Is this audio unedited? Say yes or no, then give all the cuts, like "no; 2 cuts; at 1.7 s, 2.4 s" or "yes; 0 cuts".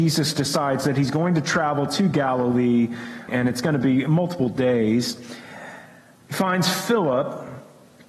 no; 1 cut; at 3.3 s